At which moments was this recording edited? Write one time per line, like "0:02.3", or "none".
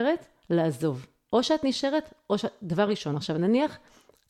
0:01.3